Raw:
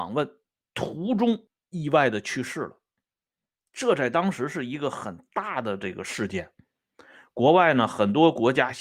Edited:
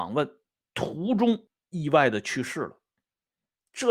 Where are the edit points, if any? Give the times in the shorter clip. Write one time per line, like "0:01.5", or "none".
none